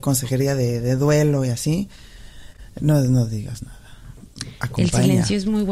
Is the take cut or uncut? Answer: uncut